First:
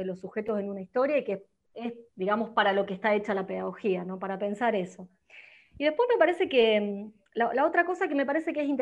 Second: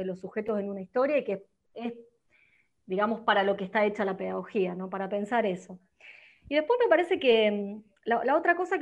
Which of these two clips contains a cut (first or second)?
first